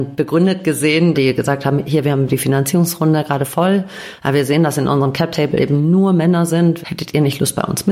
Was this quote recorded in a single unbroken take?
no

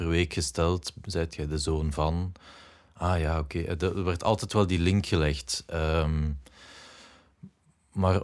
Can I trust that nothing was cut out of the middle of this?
yes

